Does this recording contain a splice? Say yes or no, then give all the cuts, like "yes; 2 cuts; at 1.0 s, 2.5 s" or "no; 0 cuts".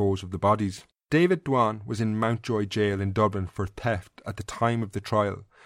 yes; 1 cut; at 1.0 s